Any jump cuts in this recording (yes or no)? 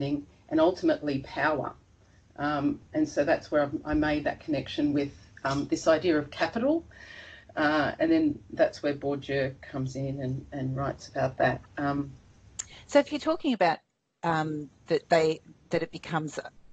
no